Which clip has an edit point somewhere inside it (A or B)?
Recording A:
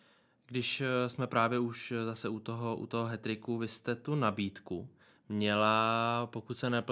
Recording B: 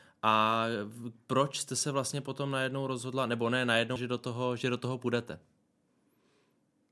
B